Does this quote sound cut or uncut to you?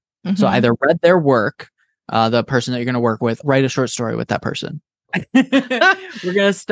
cut